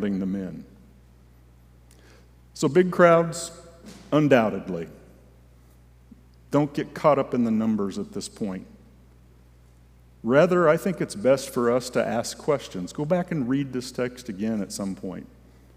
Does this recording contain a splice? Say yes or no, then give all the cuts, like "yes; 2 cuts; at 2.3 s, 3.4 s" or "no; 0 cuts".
no; 0 cuts